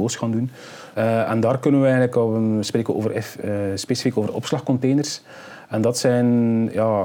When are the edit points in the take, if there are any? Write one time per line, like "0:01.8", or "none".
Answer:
0:00.9